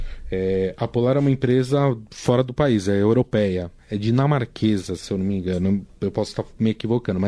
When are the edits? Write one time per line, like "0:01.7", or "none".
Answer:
none